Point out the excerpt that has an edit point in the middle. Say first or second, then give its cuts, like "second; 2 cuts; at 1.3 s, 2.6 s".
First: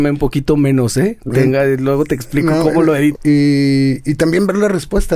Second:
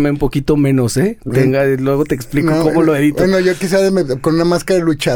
first; 1 cut; at 3.1 s